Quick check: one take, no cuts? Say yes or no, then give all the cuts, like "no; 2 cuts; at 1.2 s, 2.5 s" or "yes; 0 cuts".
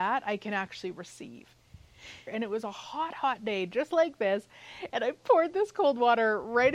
no; 2 cuts; at 2.3 s, 4.9 s